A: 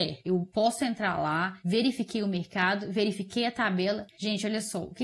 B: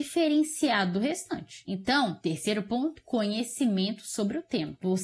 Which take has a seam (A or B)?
A